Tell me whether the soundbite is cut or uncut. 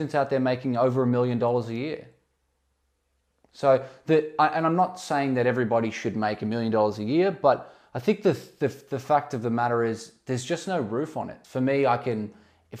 cut